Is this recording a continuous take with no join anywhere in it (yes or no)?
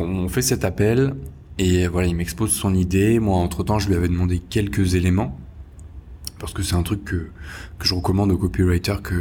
yes